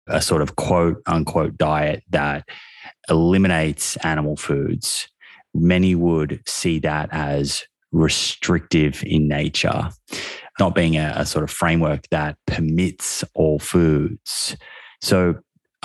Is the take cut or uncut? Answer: uncut